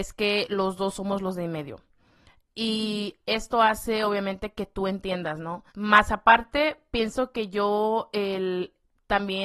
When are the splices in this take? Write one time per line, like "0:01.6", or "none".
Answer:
0:05.7